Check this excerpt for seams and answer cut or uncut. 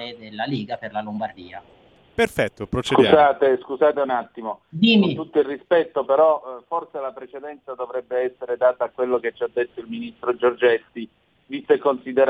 uncut